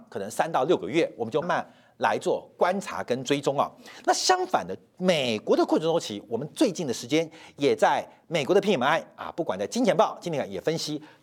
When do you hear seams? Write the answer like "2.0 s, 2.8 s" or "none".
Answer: 1.4 s